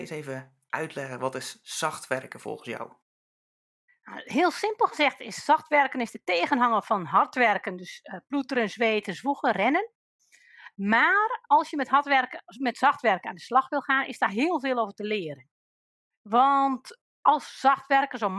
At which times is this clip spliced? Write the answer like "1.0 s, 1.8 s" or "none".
11.5 s

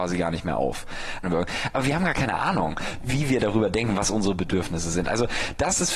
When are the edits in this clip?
1.2 s

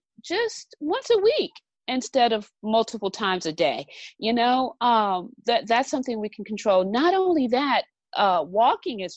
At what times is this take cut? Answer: none

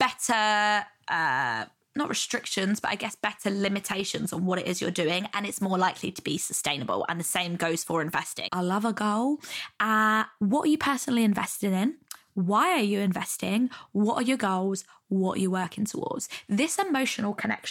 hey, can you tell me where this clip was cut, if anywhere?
8.5 s

